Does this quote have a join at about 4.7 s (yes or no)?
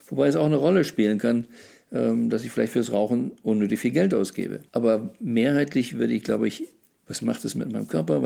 yes